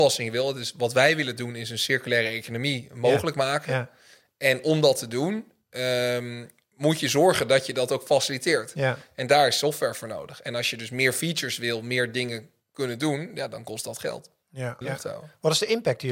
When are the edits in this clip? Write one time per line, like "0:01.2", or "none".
0:14.8